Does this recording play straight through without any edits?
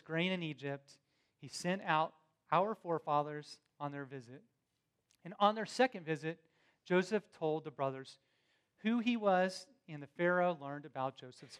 yes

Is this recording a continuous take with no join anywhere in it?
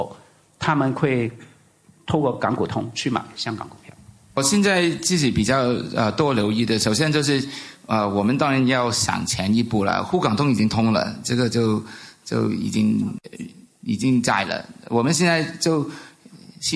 yes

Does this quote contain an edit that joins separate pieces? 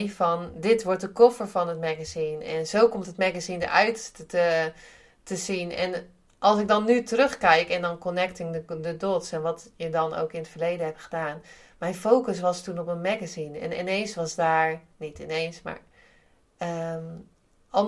no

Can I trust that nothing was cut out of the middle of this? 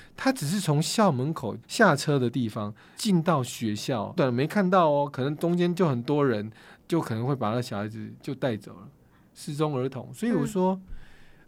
no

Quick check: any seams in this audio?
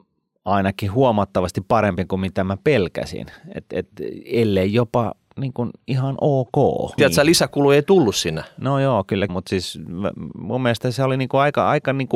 yes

